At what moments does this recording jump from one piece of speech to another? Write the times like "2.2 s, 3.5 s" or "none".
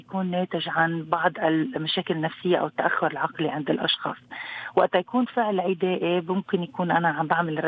none